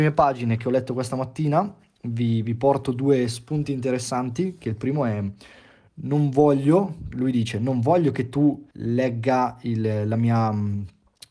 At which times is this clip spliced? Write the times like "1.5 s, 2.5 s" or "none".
8.7 s